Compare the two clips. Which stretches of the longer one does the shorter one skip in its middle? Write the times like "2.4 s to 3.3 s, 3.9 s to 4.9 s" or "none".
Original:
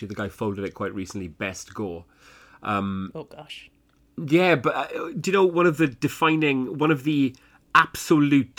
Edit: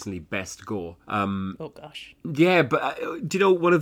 2.1 s to 2.6 s, 3.7 s to 4.1 s